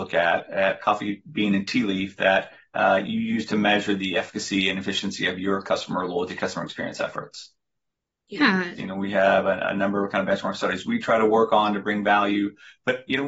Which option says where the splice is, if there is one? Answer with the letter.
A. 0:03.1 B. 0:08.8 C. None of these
B